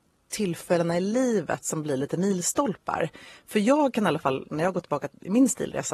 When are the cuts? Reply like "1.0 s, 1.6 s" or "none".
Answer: none